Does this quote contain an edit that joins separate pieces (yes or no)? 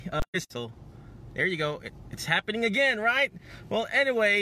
no